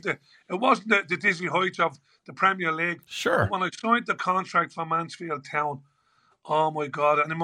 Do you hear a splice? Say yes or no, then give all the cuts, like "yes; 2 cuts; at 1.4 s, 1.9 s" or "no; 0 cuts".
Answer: no; 0 cuts